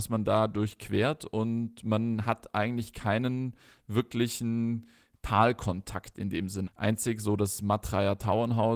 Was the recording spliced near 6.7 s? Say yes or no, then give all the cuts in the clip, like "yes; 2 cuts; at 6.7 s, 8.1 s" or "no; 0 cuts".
yes; 1 cut; at 6.7 s